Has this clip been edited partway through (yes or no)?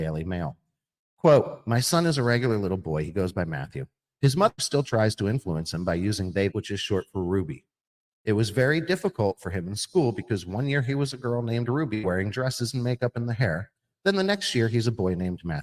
yes